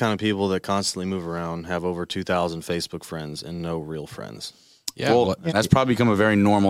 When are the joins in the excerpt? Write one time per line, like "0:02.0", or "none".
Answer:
0:05.5